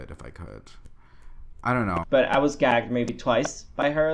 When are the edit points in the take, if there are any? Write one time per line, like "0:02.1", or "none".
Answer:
0:02.0